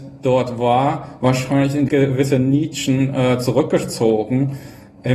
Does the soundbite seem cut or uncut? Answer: uncut